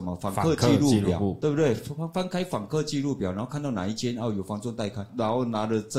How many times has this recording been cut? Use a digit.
0